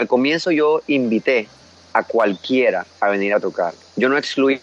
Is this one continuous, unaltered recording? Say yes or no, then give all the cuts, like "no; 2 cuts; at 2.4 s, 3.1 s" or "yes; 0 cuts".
no; 1 cut; at 2.9 s